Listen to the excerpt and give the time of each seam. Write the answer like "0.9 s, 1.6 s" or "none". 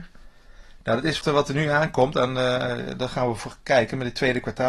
1.2 s